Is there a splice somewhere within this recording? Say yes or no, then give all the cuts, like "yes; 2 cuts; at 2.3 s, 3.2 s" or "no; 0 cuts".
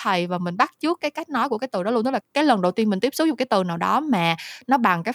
yes; 1 cut; at 2.2 s